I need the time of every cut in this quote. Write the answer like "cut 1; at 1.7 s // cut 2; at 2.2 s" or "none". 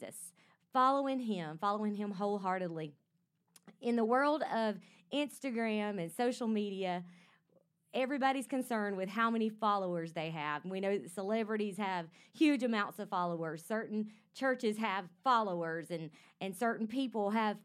none

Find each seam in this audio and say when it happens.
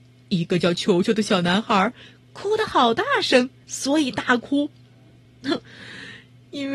cut 1; at 3.6 s // cut 2; at 5.3 s

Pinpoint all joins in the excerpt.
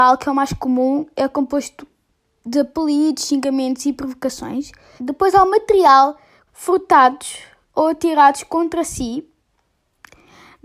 cut 1; at 5.0 s // cut 2; at 6.5 s

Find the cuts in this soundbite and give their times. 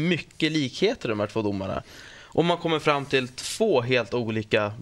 none

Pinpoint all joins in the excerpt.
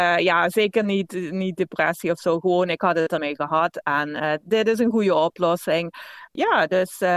cut 1; at 3.2 s // cut 2; at 4.4 s

